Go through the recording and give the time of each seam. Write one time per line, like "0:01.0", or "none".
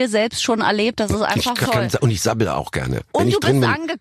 0:01.7